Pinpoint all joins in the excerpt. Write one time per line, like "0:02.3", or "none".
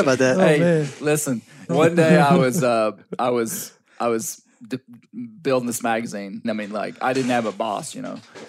0:01.7
0:06.4